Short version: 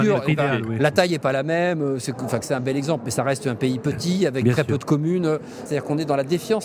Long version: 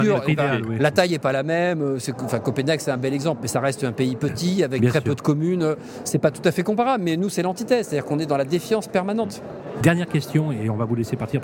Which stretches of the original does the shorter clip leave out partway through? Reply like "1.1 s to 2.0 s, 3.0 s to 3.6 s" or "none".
2.4 s to 2.8 s, 6.0 s to 7.9 s